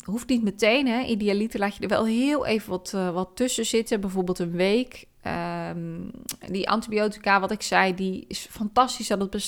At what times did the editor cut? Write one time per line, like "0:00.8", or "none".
none